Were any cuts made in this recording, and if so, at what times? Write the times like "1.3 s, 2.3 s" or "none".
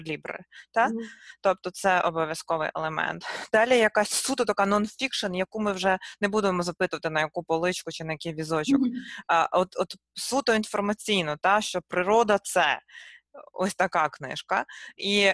none